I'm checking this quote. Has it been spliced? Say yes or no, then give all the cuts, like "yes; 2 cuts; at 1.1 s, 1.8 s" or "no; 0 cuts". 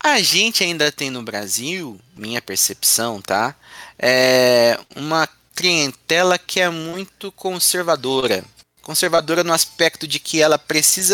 no; 0 cuts